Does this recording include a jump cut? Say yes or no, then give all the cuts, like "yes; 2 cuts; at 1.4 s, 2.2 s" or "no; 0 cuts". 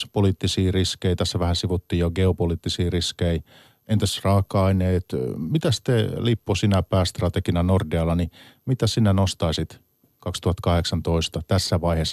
no; 0 cuts